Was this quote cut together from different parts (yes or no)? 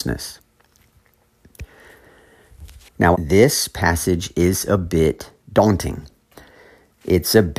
yes